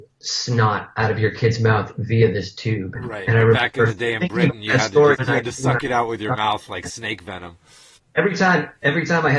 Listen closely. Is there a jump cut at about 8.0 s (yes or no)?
yes